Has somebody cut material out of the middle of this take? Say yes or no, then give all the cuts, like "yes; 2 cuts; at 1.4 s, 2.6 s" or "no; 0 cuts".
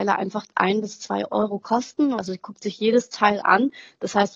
yes; 1 cut; at 2.2 s